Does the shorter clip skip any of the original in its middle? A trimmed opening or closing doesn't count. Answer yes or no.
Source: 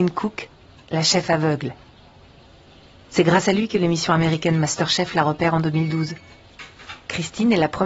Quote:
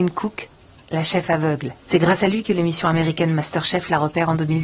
yes